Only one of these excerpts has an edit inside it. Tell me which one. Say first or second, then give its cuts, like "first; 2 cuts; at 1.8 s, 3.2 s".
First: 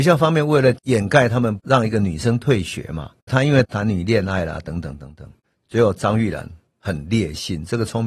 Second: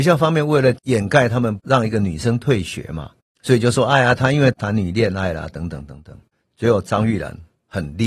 first; 1 cut; at 3.3 s